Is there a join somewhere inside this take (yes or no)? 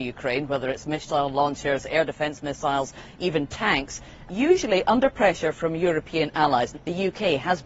yes